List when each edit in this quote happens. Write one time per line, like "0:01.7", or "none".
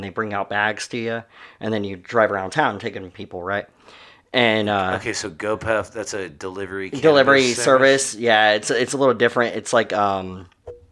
none